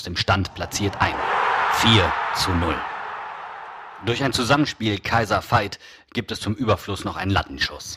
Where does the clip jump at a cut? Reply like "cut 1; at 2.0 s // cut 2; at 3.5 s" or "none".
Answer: none